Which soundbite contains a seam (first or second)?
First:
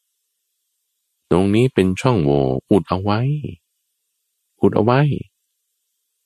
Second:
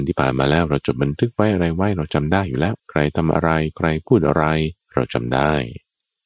second